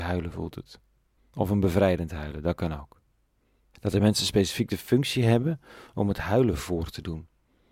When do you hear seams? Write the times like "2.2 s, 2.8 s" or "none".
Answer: 1.2 s, 3.7 s